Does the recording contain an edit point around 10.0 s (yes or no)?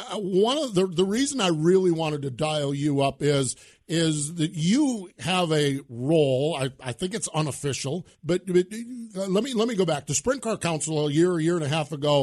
no